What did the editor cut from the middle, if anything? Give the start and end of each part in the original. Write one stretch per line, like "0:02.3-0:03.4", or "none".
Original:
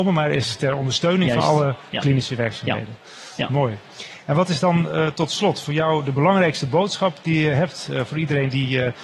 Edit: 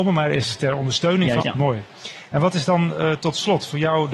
0:01.4-0:03.4